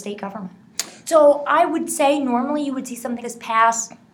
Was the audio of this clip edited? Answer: yes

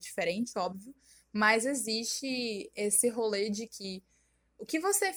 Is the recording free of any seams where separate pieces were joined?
yes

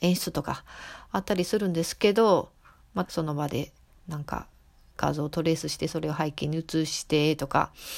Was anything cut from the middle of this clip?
yes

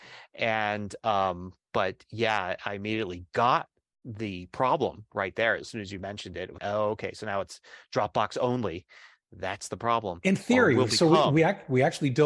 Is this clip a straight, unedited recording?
no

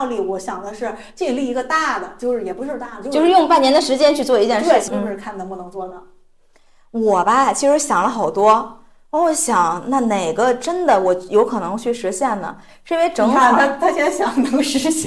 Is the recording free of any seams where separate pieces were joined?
no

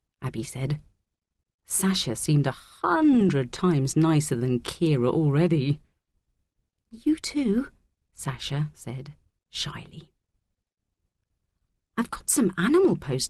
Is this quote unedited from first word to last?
yes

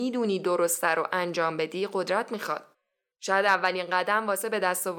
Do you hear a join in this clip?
yes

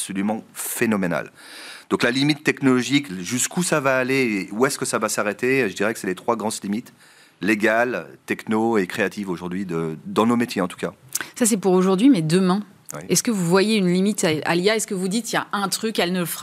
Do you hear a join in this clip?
no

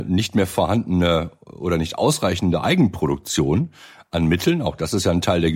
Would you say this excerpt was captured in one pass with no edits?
yes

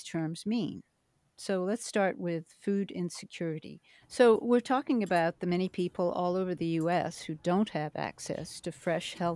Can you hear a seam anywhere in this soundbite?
yes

